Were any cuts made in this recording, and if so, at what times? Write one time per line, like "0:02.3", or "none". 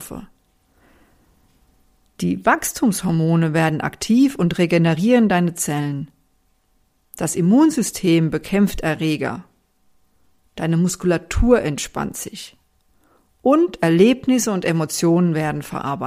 none